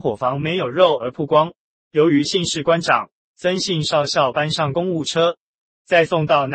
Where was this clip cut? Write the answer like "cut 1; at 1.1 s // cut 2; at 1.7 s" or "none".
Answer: cut 1; at 1.8 s

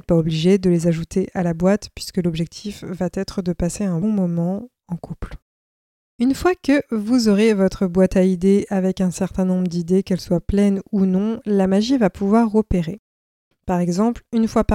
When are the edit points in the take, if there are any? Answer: cut 1; at 4.0 s // cut 2; at 13.5 s

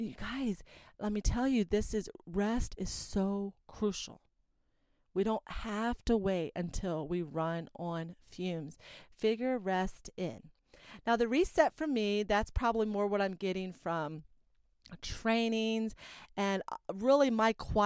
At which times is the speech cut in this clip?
none

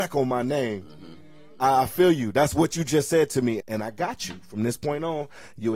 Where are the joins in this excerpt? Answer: cut 1; at 3.6 s

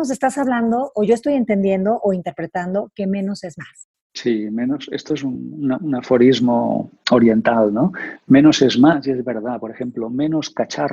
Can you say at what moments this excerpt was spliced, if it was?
none

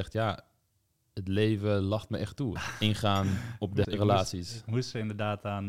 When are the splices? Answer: cut 1; at 2.6 s // cut 2; at 3.8 s

